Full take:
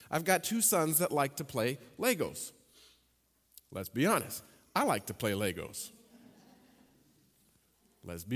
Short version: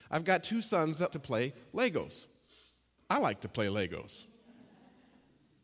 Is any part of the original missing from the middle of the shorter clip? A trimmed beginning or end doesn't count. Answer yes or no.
yes